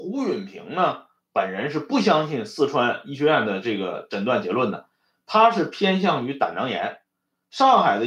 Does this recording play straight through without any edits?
yes; 0 cuts

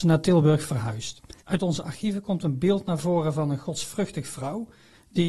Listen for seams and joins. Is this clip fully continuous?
no; 1 cut; at 1.4 s

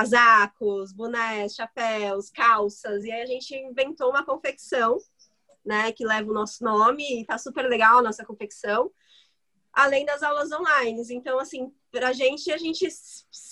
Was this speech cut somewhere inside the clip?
no; 0 cuts

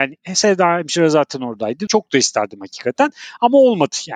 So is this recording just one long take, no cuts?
no; 1 cut; at 1.9 s

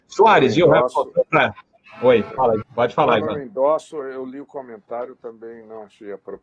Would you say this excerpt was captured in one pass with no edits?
no; 1 cut; at 2.6 s

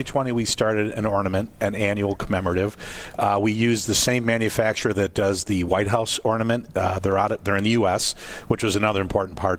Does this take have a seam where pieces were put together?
no; 0 cuts

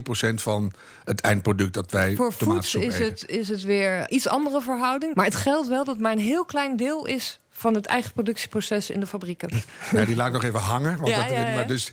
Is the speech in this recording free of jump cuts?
no; 3 cuts; at 4.1 s, 5.1 s, 9.5 s

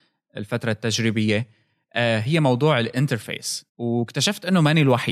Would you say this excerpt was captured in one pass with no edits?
no; 1 cut; at 3.7 s

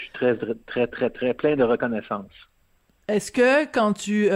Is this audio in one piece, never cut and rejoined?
yes; 0 cuts

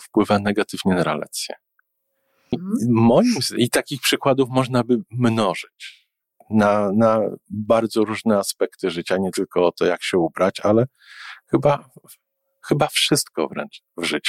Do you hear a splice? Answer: yes; 1 cut; at 2.5 s

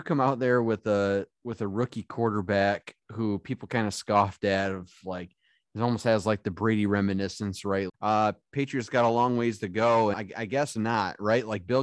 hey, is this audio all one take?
no; 2 cuts; at 7.9 s, 10.1 s

